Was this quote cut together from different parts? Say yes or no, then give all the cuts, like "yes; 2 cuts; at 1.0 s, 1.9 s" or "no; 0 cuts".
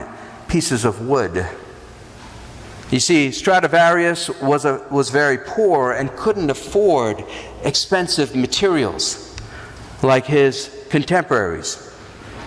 yes; 1 cut; at 2.8 s